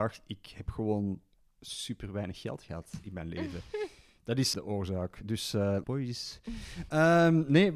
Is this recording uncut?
no; 2 cuts; at 4.5 s, 5.8 s

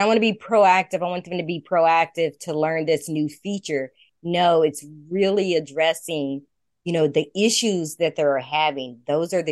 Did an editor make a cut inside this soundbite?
no; 0 cuts

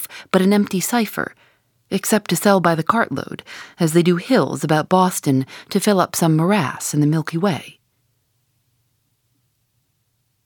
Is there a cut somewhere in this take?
no; 0 cuts

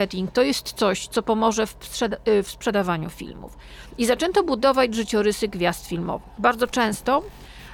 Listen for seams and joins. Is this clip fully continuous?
yes; 0 cuts

